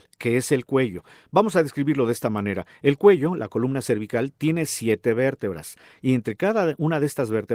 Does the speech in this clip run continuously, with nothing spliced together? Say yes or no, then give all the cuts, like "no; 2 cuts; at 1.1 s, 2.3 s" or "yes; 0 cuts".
yes; 0 cuts